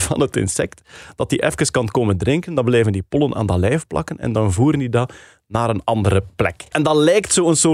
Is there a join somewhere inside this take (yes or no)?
no